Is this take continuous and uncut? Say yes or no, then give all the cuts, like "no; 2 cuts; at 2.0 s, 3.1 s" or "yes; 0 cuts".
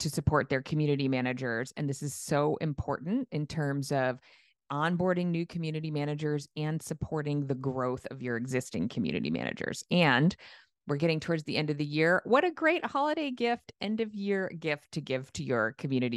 yes; 0 cuts